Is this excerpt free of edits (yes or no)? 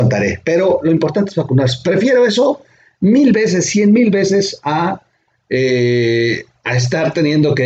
yes